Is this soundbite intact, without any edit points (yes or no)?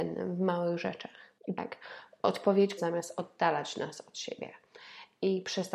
no